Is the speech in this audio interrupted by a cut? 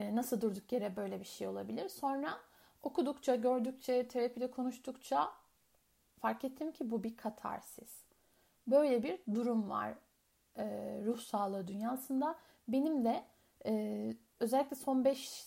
no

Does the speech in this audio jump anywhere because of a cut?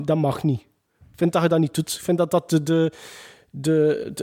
no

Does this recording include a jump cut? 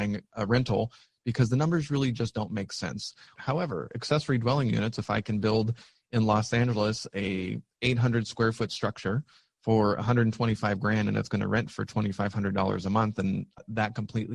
yes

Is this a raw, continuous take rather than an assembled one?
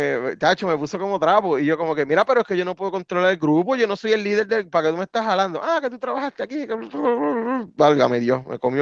yes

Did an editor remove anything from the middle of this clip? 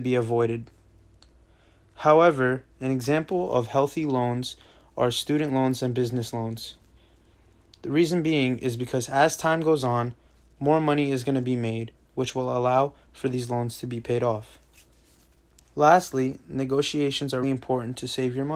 yes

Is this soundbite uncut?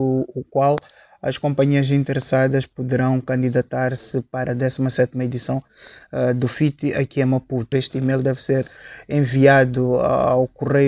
no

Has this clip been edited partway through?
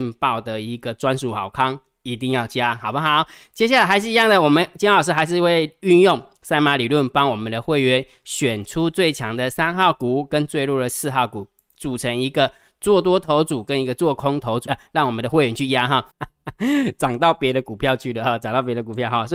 yes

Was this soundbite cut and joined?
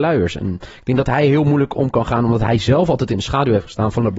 no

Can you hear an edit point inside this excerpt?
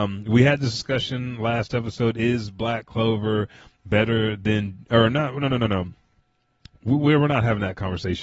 no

